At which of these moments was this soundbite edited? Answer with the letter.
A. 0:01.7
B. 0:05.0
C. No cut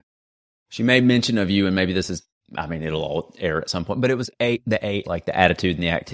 B